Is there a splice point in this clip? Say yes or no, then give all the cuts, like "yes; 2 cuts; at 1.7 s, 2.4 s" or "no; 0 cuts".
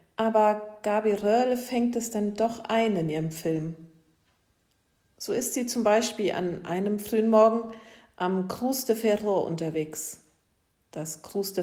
no; 0 cuts